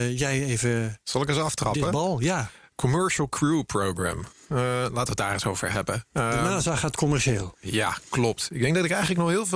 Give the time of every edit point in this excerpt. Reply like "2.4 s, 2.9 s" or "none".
none